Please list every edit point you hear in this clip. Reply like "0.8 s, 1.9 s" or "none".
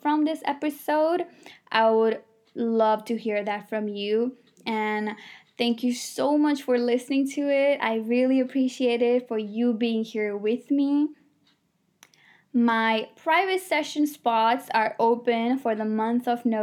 none